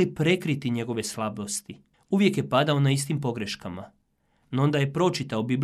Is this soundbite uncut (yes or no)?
no